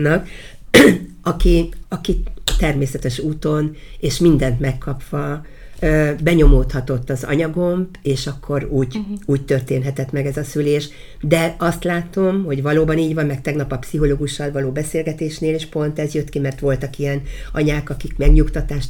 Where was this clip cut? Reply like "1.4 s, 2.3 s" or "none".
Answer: 1.8 s